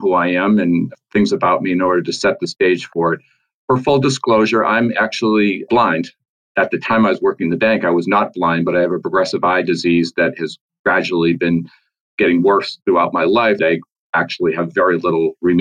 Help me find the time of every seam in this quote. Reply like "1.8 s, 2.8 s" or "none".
13.6 s